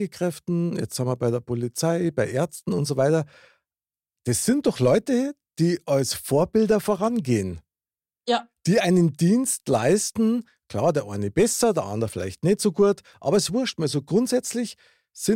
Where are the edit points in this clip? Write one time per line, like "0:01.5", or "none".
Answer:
none

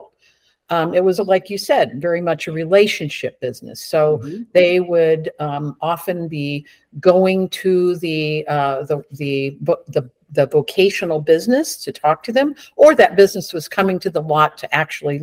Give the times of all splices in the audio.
0:01.2

